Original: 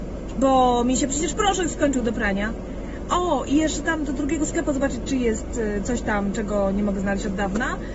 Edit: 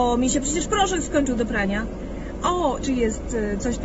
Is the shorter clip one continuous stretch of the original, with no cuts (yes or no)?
no